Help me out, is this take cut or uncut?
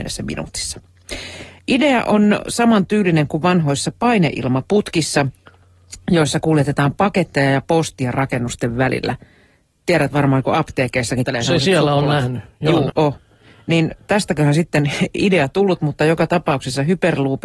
cut